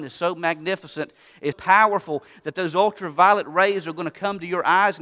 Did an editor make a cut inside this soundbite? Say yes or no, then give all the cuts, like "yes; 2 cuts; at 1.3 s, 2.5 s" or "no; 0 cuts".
yes; 1 cut; at 1.5 s